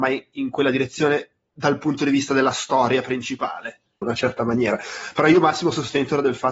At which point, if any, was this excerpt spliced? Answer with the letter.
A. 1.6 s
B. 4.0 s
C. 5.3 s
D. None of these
B